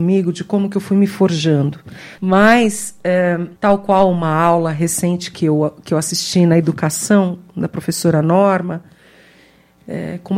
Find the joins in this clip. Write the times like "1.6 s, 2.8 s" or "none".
2.2 s, 3.6 s